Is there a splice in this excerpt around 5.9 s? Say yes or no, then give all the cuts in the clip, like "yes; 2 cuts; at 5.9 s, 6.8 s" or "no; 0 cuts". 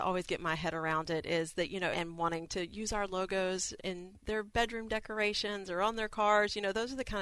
no; 2 cuts; at 1.9 s, 3.8 s